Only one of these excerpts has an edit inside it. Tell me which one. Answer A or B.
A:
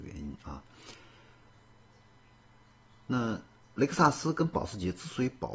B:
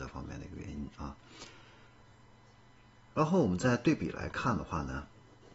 B